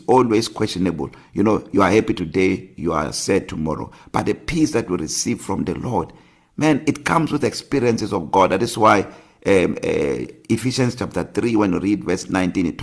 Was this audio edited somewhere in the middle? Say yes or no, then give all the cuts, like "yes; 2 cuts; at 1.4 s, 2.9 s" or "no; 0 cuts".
no; 0 cuts